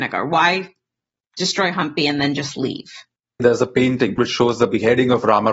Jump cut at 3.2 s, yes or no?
no